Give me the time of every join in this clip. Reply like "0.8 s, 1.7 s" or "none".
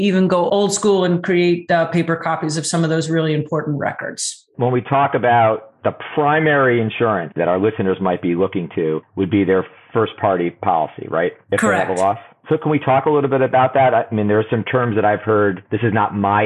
none